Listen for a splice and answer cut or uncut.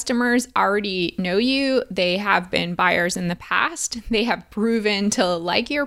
uncut